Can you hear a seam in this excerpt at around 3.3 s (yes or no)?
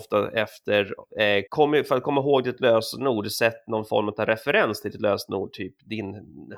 no